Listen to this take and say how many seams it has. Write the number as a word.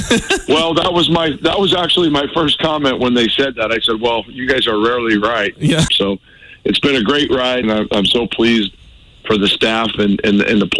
two